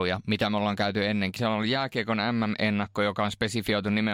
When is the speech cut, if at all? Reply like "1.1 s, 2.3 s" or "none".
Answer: 1.4 s